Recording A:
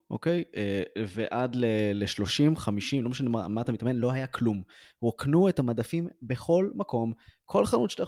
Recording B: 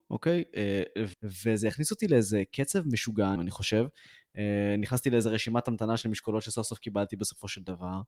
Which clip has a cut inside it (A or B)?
B